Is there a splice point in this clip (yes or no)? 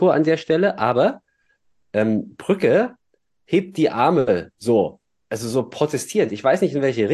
no